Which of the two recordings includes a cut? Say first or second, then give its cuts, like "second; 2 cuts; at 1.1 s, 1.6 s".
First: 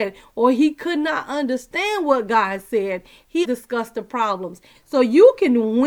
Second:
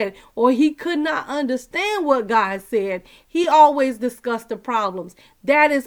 first; 2 cuts; at 3.4 s, 4.7 s